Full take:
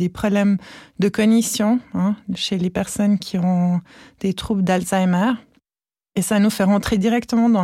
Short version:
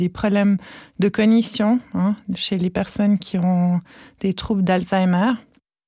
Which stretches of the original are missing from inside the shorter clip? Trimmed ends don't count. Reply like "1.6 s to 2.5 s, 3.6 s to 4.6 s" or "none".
none